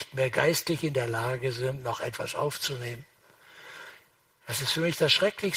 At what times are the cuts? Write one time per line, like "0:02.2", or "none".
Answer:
none